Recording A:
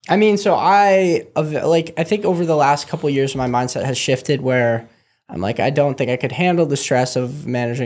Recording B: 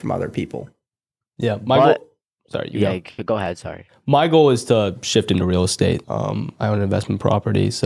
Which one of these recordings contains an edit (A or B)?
B